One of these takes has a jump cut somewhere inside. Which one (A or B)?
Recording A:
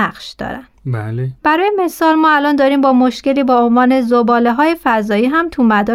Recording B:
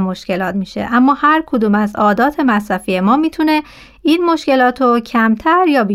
A